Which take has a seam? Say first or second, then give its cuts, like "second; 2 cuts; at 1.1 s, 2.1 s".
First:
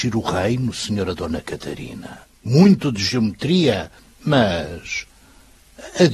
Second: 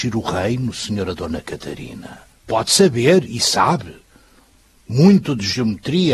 first; 1 cut; at 2.2 s